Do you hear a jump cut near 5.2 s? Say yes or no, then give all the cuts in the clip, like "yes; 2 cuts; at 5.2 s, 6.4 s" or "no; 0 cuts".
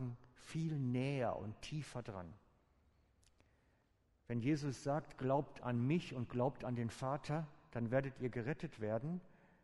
no; 0 cuts